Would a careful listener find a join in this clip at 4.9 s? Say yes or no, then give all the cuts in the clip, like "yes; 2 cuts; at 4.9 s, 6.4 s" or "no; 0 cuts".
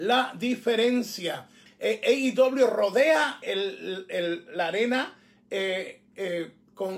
no; 2 cuts; at 1.7 s, 3.4 s